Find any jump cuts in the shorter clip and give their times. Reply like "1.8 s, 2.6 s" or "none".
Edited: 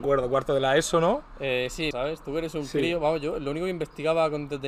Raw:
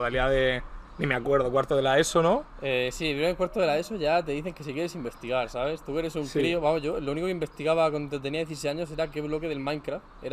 1.9 s

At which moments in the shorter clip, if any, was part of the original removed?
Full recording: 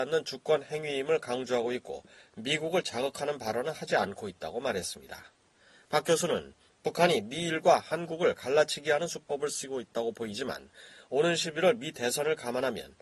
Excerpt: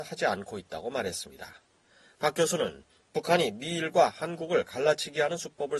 none

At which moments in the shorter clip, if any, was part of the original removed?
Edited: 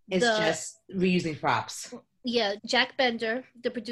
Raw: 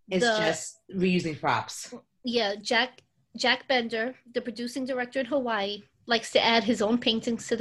2.6 s

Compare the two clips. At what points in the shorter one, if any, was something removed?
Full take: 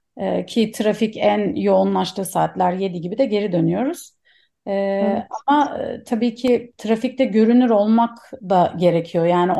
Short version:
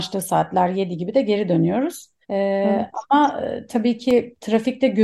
2.2 s

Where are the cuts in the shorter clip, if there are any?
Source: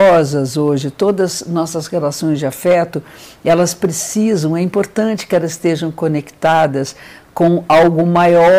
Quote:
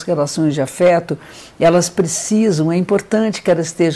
none

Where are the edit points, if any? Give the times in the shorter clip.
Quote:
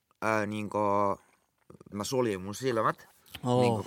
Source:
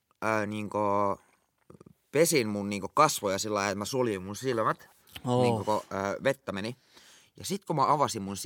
1.9 s

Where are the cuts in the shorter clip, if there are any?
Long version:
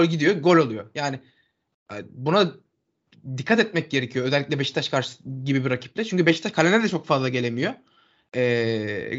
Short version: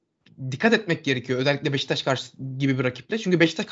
none

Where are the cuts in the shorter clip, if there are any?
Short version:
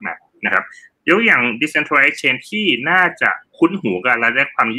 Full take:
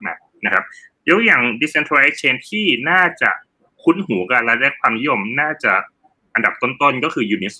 3.5 s

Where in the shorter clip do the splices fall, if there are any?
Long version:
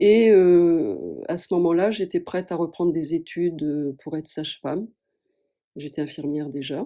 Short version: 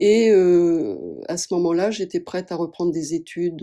none

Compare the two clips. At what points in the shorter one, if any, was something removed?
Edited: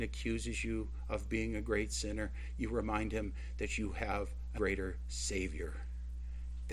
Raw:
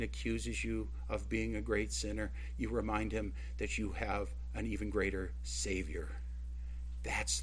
4.6 s

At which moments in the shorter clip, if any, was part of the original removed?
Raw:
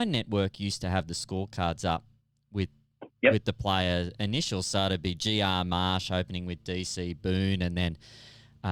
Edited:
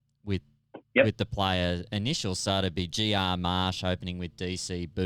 none

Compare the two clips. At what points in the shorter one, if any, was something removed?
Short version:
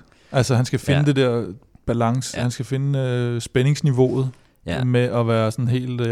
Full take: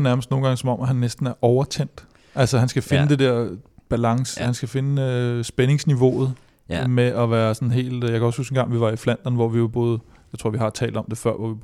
none

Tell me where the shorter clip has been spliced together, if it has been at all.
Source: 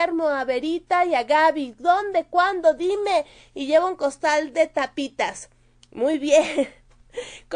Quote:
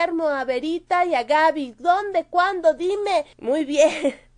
3.3 s

